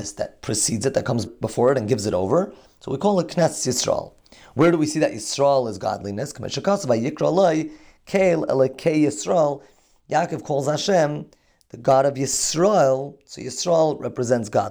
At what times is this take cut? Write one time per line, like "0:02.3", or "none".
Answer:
0:01.3